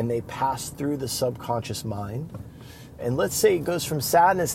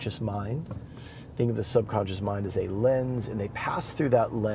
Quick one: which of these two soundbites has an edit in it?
first; 1 cut; at 3.0 s

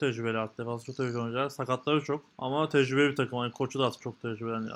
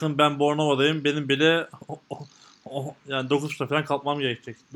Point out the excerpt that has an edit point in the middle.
first; 1 cut; at 2.3 s

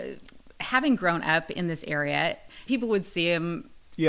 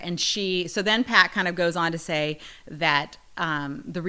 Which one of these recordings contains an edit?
first; 1 cut; at 2.7 s

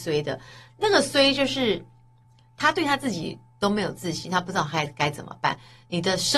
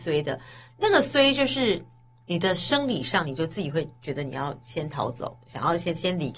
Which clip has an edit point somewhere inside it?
second; 1 cut; at 2.2 s

